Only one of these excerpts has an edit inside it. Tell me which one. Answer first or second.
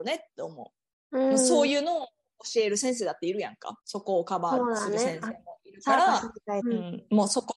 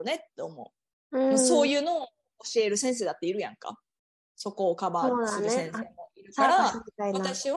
first